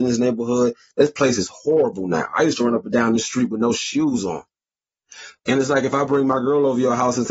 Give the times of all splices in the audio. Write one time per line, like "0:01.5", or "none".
0:05.4